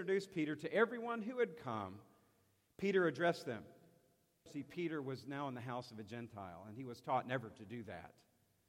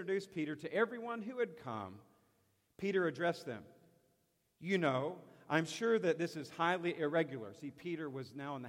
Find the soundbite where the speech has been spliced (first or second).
first